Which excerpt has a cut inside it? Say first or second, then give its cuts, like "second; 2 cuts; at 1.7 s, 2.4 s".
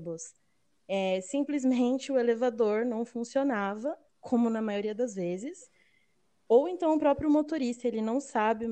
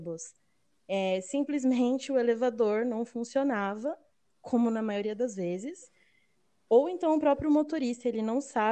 first; 1 cut; at 4.1 s